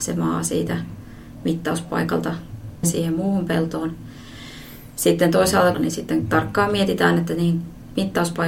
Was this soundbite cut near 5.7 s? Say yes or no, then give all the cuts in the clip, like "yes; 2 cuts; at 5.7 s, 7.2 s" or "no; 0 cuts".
yes; 2 cuts; at 2.8 s, 5.7 s